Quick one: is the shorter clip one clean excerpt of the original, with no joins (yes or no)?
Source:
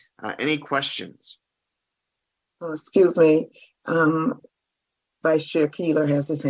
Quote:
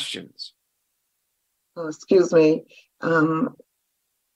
yes